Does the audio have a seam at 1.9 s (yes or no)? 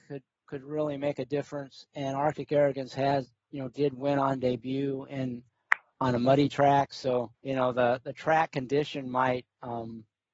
no